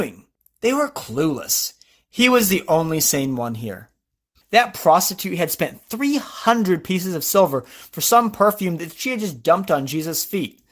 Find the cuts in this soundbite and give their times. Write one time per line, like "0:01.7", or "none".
0:04.4